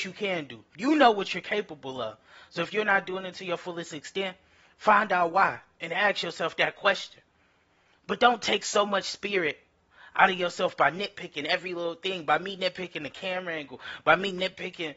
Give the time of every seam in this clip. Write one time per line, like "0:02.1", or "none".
none